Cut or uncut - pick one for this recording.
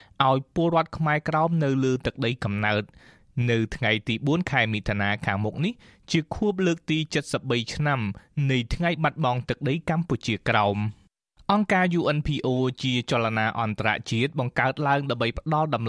uncut